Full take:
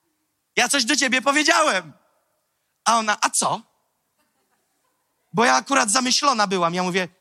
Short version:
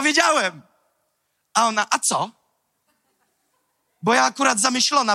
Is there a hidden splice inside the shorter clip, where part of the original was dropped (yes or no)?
no